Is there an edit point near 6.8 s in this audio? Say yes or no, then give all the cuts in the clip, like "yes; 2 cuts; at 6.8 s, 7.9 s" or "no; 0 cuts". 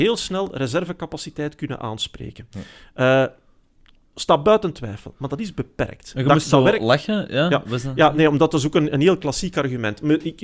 no; 0 cuts